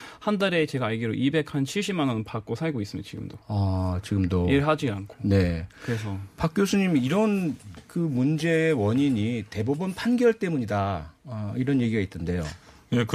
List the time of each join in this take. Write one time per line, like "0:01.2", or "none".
none